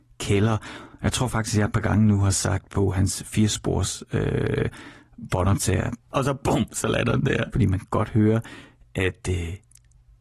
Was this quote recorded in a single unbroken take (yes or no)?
no